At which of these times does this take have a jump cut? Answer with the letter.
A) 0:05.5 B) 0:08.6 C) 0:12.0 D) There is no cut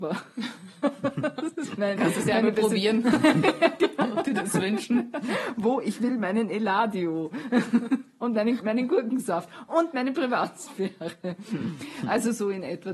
B